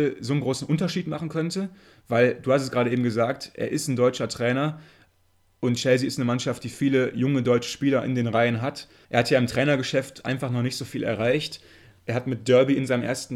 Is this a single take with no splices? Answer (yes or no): no